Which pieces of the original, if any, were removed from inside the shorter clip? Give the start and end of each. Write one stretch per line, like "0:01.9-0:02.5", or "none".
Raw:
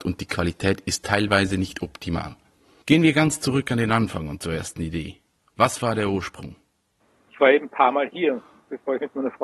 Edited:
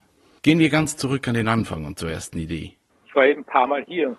0:05.3-0:07.1